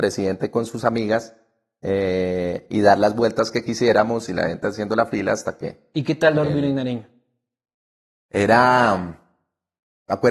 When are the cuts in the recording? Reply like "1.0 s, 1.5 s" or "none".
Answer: none